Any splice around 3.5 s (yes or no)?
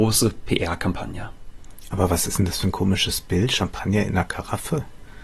no